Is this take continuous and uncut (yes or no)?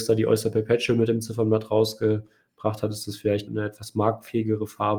no